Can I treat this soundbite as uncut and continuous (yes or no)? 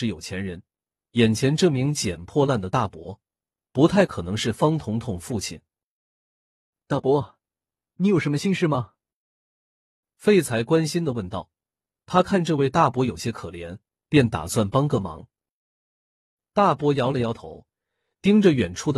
no